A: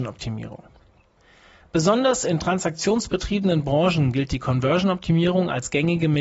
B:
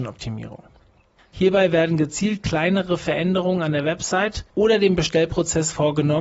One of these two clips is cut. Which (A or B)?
B